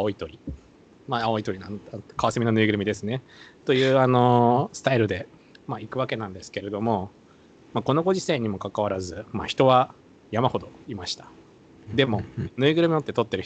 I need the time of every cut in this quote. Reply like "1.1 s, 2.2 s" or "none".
none